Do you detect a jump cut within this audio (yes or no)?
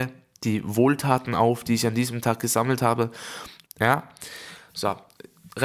yes